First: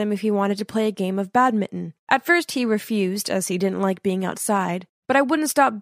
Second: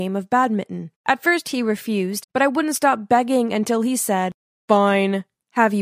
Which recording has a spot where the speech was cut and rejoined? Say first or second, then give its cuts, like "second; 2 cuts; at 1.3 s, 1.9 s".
second; 1 cut; at 2.2 s